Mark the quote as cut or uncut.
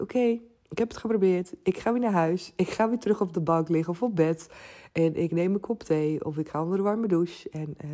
uncut